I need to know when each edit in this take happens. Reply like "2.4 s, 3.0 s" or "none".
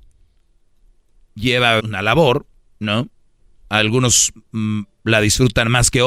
1.8 s